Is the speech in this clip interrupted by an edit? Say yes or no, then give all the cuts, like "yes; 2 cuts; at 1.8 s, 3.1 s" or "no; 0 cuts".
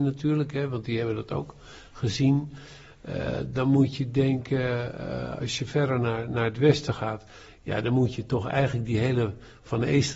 no; 0 cuts